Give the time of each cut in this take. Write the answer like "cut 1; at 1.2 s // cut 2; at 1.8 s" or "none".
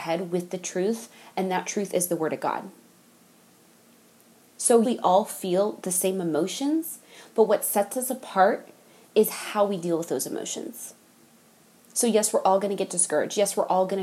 cut 1; at 4.8 s